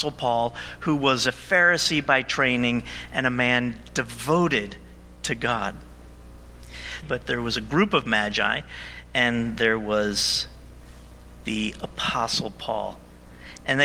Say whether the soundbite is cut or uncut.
cut